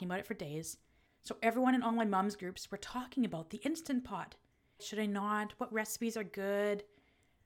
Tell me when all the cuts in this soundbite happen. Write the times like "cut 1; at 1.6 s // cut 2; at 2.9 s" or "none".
cut 1; at 1.1 s // cut 2; at 4.8 s